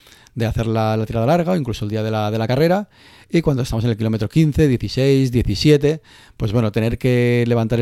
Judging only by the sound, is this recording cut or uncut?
uncut